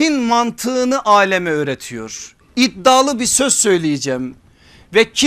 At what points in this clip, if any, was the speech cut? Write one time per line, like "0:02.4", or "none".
none